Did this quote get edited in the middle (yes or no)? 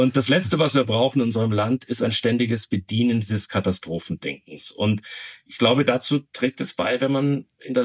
no